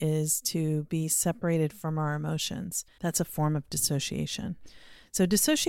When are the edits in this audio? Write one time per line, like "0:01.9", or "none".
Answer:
0:03.0